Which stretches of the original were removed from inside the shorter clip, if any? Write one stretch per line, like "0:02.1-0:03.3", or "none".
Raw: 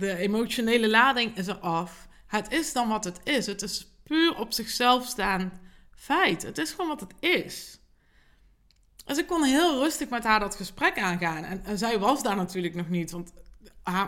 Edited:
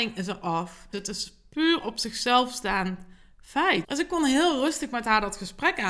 0:02.1-0:03.5
0:06.4-0:09.0